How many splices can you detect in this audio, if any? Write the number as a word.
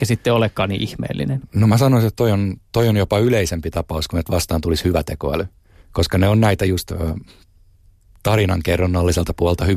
zero